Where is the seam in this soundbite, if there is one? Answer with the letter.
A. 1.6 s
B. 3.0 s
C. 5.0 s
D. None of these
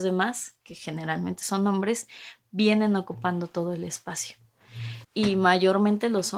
C